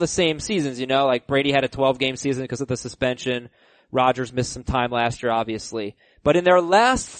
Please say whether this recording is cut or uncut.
uncut